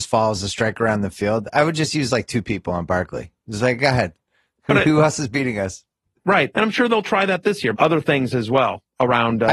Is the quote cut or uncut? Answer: cut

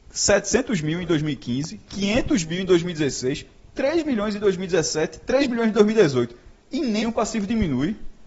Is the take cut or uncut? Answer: cut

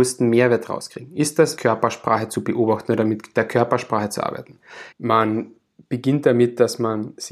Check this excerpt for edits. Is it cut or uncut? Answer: cut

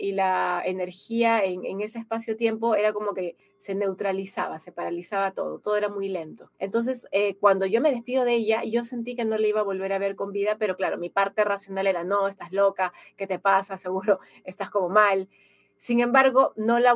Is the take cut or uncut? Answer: cut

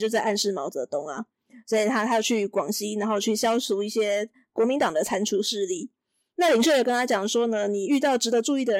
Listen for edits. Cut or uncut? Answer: uncut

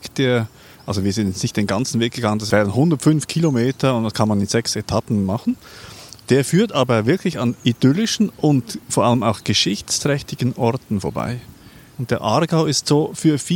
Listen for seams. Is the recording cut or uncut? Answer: cut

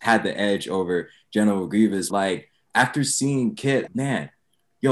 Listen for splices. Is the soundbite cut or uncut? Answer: cut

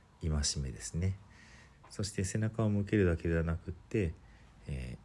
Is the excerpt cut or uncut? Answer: cut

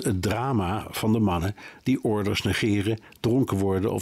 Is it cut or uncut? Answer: uncut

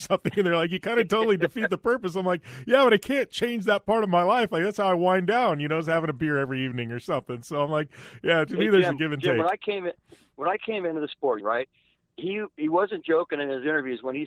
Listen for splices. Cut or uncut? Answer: cut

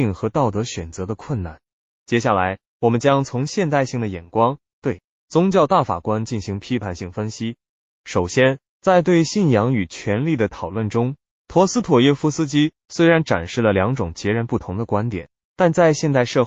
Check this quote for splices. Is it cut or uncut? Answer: uncut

